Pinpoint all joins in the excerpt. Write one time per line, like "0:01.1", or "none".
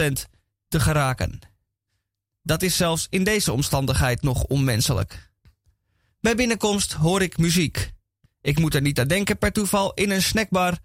0:08.3